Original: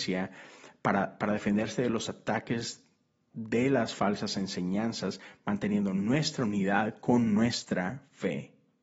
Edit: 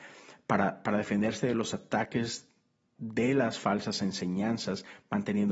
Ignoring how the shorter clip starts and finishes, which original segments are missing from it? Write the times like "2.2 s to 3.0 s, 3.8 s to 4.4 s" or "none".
none